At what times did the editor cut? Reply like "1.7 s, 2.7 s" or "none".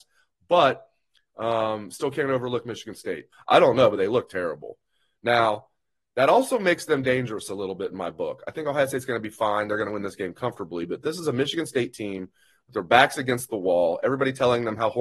3.3 s